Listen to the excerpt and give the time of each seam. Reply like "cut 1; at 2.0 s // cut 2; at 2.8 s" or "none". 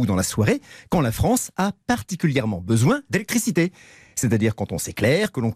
none